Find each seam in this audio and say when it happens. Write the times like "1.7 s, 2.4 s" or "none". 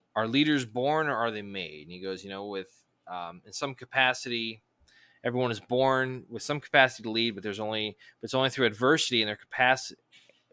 none